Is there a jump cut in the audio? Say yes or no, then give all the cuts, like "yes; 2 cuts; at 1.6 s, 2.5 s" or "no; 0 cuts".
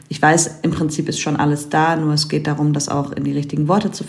no; 0 cuts